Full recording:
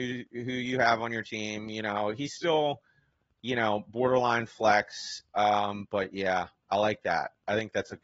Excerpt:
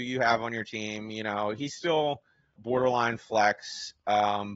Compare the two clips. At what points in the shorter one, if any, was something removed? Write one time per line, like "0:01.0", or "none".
0:02.6